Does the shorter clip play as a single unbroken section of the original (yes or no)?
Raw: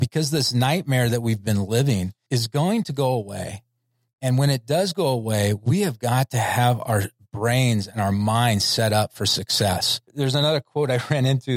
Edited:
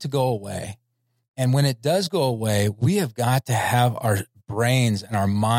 yes